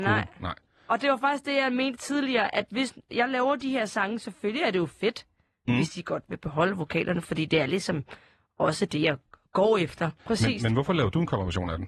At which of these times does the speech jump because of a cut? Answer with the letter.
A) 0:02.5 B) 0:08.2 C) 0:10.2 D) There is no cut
C